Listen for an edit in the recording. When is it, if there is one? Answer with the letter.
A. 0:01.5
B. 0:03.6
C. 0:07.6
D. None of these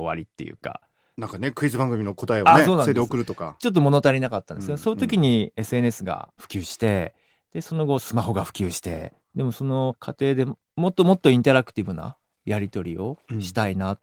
D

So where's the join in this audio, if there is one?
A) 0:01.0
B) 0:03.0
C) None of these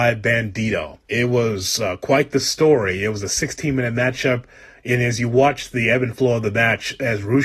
A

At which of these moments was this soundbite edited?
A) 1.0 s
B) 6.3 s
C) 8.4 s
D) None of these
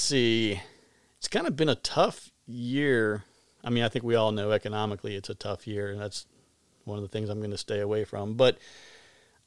D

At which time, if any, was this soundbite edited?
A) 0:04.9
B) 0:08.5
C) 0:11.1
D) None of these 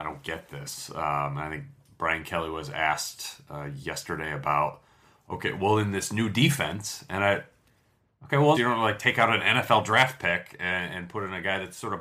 B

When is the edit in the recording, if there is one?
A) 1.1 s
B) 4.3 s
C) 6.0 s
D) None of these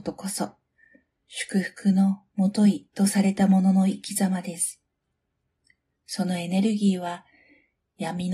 C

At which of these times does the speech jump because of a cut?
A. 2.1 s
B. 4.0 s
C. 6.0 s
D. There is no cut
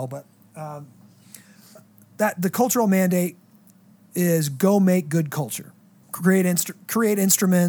C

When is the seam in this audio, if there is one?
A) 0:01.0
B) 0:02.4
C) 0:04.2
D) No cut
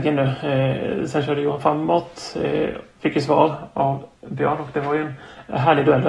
C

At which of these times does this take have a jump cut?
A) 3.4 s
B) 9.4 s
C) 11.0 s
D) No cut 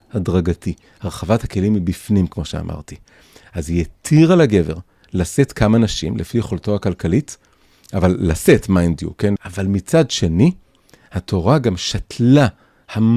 B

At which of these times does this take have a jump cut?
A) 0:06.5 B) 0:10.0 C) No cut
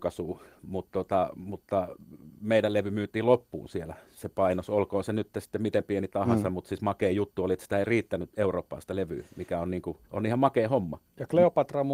B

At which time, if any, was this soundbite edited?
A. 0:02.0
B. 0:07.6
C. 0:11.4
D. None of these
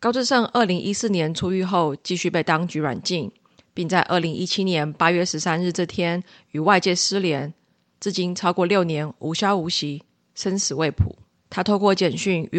C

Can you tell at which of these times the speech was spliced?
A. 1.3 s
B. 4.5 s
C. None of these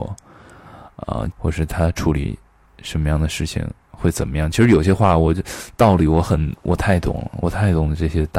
A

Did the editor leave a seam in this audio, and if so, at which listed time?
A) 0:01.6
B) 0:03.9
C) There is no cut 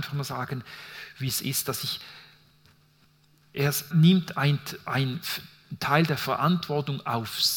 B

